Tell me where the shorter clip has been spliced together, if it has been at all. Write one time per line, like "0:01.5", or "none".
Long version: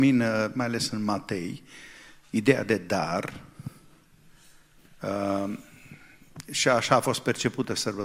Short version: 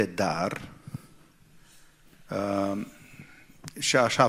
none